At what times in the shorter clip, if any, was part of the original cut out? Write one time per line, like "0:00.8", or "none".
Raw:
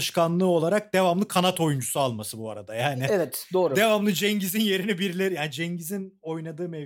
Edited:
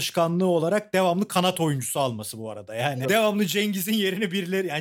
0:03.0